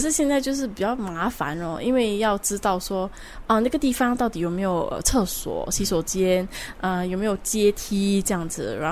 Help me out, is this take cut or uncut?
uncut